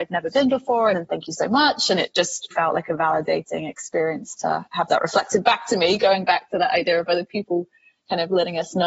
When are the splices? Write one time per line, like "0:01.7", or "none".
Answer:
0:00.9
0:02.5